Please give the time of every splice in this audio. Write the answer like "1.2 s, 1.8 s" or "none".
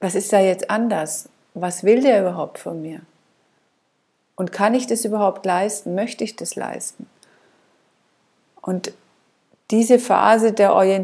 none